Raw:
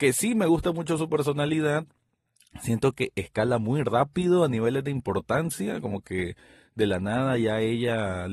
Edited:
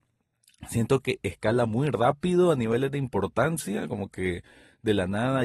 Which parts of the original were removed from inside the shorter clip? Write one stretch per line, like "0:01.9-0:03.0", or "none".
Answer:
none